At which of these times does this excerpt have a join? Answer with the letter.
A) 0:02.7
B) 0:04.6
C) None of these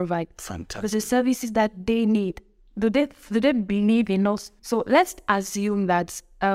B